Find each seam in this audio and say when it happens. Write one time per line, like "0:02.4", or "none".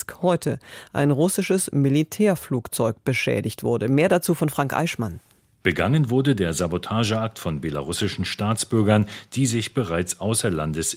0:05.6